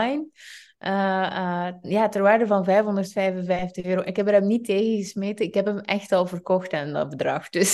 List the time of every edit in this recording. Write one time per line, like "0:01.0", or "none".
none